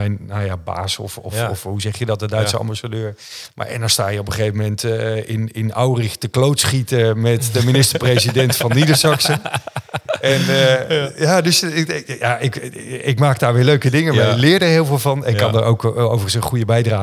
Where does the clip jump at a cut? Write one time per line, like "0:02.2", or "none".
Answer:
0:03.5